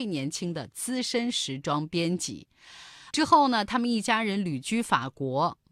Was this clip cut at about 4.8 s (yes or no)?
no